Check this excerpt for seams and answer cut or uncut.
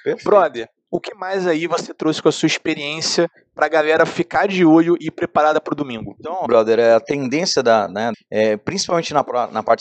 cut